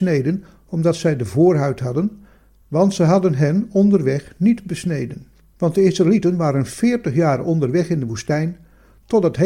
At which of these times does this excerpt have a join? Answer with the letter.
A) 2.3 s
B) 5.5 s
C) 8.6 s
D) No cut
B